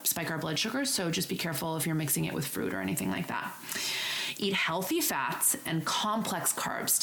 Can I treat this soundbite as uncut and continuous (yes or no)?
yes